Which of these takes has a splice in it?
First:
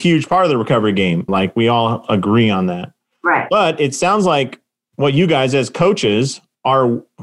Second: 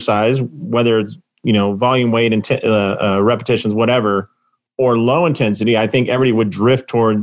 first; 1 cut; at 1.3 s

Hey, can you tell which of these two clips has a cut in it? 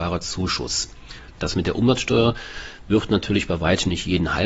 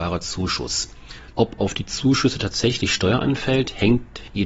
second; 1 cut; at 1.3 s

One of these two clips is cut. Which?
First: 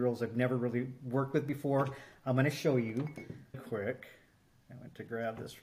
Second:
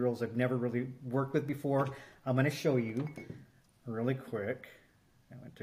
first; 1 cut; at 3.5 s

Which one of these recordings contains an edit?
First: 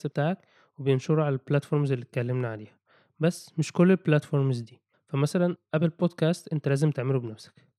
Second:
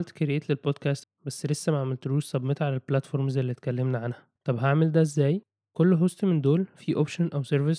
second; 2 cuts; at 1.0 s, 4.4 s

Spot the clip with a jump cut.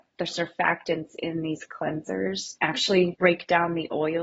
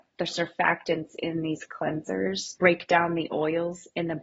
second; 1 cut; at 2.6 s

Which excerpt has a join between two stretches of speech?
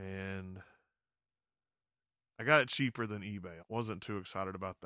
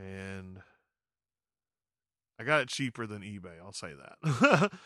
first; 1 cut; at 3.6 s

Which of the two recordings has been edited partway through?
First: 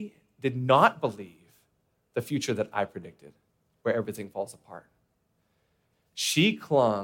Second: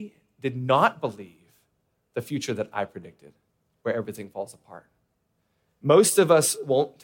second; 1 cut; at 5.6 s

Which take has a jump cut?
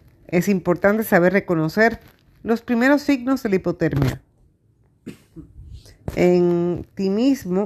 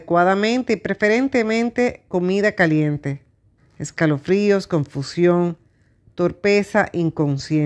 second; 1 cut; at 3.6 s

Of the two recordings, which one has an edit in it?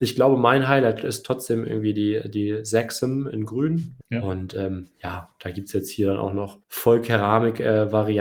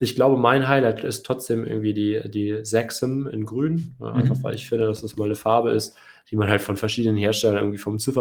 first; 2 cuts; at 4.0 s, 6.6 s

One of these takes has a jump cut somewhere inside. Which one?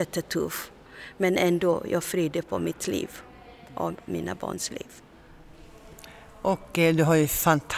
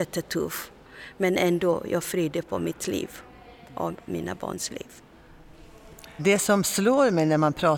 second; 1 cut; at 6.2 s

